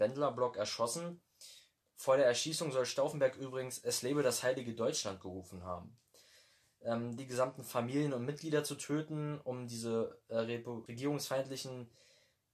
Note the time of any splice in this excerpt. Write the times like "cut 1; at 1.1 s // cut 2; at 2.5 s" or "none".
cut 1; at 7.2 s // cut 2; at 10.9 s